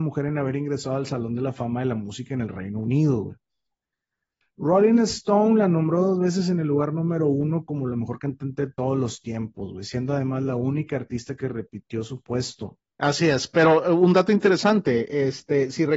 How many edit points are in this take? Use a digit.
1